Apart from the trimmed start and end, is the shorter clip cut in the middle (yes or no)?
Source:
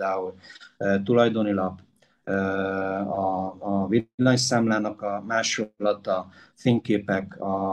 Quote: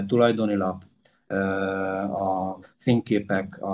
yes